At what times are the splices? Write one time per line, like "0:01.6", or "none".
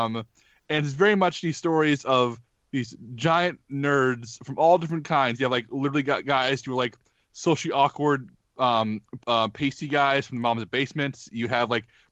0:09.2